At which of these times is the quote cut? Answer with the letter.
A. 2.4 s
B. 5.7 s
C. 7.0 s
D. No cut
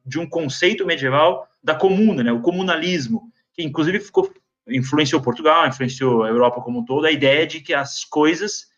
D